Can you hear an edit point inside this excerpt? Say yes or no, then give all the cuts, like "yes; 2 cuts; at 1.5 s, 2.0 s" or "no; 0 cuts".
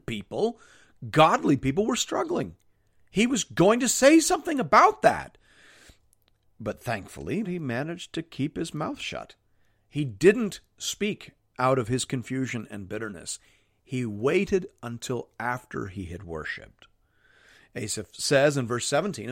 yes; 1 cut; at 7.4 s